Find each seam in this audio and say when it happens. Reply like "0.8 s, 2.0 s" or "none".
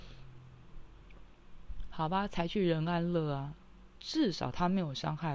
4.0 s